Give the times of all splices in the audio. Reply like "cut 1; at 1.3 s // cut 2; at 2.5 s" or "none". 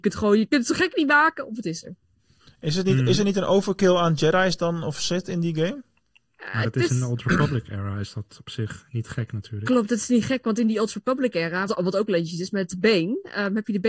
cut 1; at 11.7 s